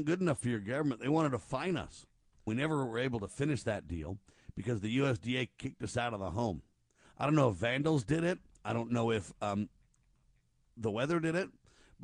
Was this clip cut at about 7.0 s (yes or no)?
yes